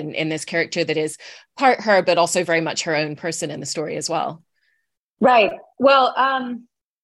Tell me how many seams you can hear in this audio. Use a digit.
0